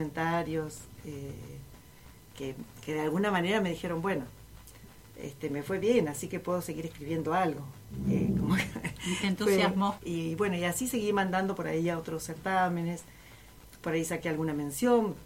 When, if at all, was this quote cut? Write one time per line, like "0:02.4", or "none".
0:10.0